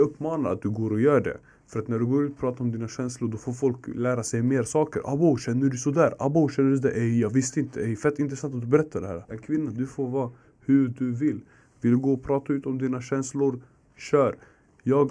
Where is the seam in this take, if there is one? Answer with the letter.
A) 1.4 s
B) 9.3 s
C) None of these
B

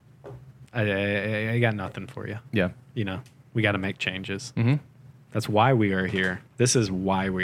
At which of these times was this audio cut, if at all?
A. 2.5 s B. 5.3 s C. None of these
B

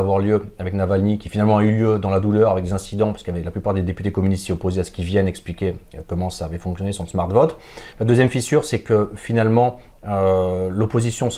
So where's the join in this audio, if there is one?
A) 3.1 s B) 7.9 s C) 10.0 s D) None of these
B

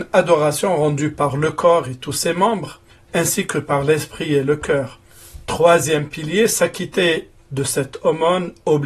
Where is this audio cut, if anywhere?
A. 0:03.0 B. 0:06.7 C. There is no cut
C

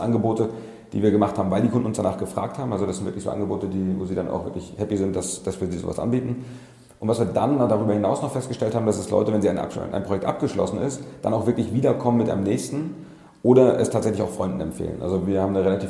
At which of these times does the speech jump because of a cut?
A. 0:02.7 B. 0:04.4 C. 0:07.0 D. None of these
D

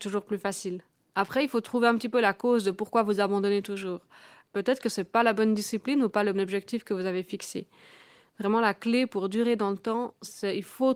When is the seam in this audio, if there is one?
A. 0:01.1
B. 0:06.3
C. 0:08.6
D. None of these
B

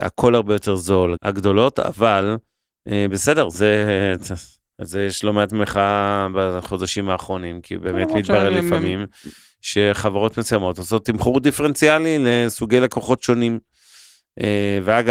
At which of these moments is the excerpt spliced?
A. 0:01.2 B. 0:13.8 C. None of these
A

